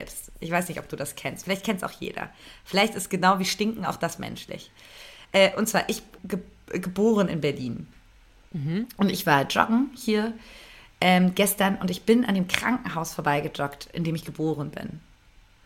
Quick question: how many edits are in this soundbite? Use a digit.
1